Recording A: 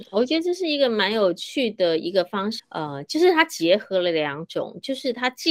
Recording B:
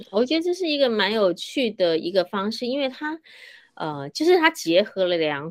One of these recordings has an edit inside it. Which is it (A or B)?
A